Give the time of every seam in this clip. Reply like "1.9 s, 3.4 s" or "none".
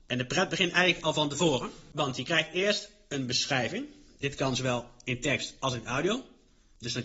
none